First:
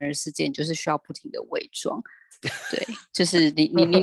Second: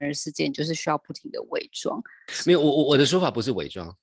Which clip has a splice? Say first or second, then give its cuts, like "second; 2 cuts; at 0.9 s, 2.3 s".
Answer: second; 1 cut; at 2.3 s